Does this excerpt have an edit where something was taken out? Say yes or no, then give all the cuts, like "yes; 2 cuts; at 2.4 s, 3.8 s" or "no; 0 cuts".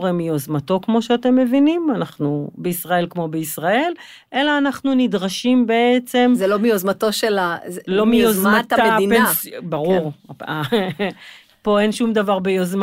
no; 0 cuts